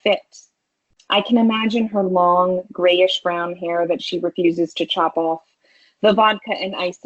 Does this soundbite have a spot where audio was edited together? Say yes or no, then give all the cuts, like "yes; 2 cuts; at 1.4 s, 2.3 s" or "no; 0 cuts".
yes; 1 cut; at 1.0 s